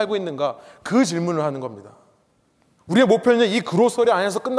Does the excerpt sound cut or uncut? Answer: cut